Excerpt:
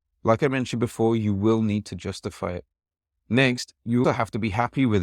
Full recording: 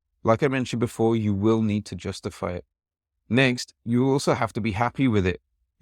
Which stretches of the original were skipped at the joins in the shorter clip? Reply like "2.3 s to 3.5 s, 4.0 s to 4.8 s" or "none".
4.0 s to 4.3 s